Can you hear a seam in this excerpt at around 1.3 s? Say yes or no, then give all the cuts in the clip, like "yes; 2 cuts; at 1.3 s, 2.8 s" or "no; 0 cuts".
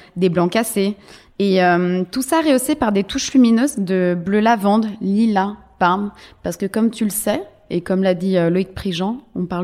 no; 0 cuts